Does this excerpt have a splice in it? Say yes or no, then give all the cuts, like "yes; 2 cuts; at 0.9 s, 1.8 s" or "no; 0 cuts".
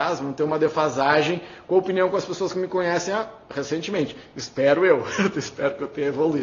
no; 0 cuts